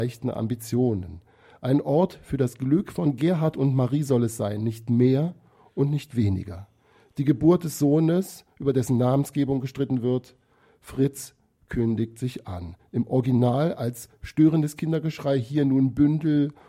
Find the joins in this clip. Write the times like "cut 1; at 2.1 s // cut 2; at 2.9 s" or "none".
none